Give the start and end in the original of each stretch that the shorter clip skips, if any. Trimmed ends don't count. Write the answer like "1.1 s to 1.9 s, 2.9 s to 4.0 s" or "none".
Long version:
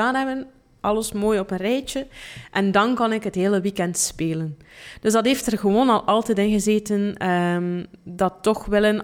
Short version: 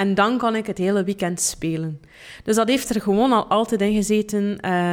none